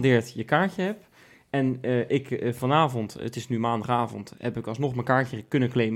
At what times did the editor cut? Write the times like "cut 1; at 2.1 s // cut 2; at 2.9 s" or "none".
none